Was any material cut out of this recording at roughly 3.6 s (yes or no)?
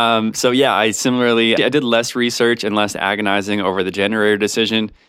no